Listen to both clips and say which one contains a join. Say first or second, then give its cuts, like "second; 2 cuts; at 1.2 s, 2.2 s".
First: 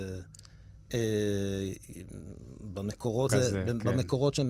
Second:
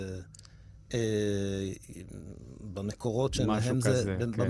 first; 1 cut; at 3.3 s